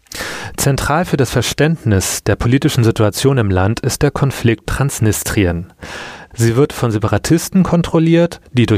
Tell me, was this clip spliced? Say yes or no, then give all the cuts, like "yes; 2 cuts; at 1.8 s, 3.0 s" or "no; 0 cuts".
yes; 2 cuts; at 4.6 s, 6.3 s